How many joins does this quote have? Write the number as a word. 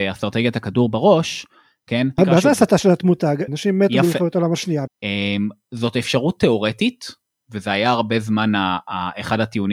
three